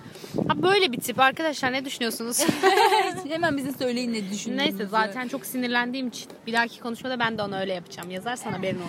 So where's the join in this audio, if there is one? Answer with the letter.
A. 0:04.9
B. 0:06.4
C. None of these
B